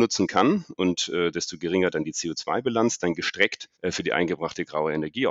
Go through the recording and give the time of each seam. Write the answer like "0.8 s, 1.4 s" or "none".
3.7 s